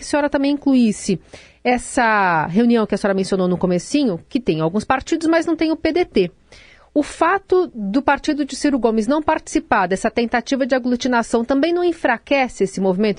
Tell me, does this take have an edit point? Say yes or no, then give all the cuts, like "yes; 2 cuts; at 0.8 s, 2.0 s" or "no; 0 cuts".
no; 0 cuts